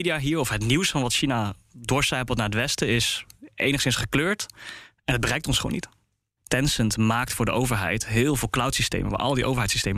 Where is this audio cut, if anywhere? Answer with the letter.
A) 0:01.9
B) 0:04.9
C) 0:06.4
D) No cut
C